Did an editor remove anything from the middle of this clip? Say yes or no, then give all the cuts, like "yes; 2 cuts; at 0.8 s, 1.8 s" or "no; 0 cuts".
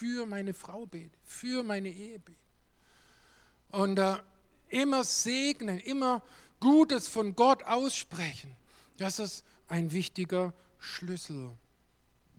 yes; 1 cut; at 9.6 s